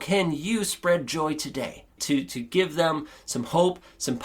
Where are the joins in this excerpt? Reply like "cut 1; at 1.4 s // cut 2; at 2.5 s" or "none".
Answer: cut 1; at 2.0 s